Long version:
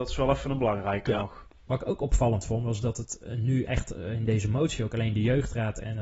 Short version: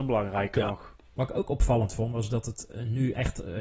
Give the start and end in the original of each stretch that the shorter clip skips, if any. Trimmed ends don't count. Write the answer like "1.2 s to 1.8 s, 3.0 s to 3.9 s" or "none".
none